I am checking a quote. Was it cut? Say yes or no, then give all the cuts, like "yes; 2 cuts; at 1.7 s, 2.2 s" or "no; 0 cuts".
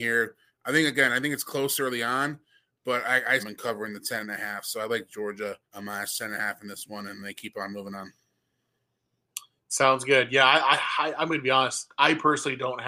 yes; 2 cuts; at 3.4 s, 5.6 s